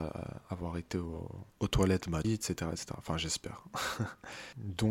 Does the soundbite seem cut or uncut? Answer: cut